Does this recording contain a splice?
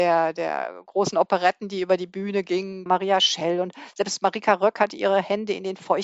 yes; 1 cut; at 2.9 s

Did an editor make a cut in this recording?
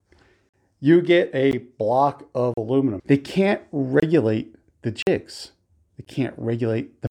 yes; 1 cut; at 3.0 s

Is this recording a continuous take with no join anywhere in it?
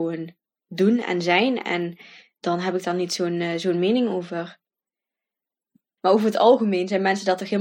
no; 1 cut; at 6.0 s

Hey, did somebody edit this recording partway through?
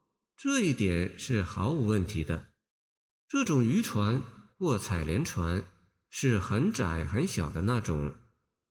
yes; 1 cut; at 3.1 s

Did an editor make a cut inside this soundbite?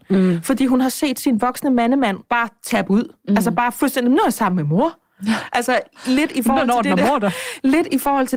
no; 0 cuts

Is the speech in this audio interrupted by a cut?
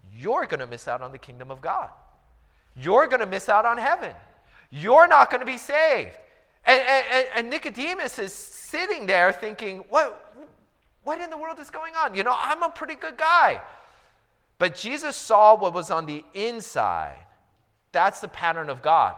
no; 0 cuts

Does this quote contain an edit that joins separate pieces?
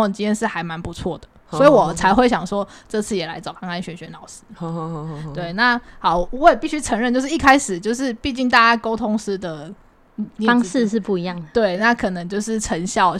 no; 0 cuts

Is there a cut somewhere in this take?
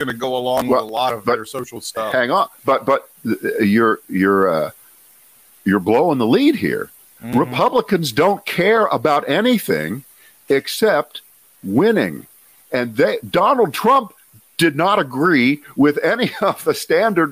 no; 0 cuts

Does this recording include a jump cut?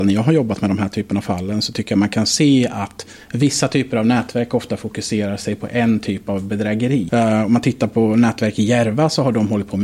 yes; 1 cut; at 7.1 s

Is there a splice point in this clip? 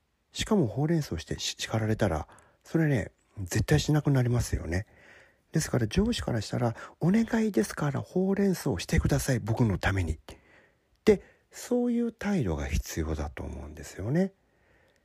no; 0 cuts

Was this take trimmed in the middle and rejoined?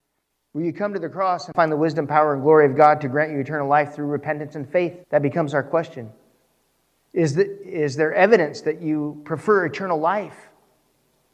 yes; 1 cut; at 5.0 s

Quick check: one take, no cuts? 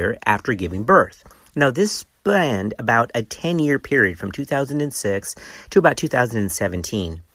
yes; 0 cuts

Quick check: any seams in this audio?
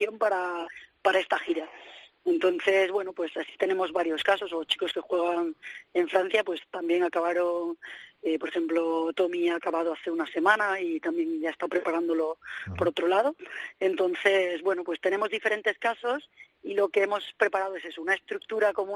no; 0 cuts

